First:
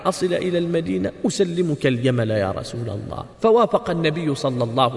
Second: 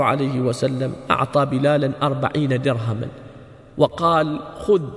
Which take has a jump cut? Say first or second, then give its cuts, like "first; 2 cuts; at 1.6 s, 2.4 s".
first; 1 cut; at 3.3 s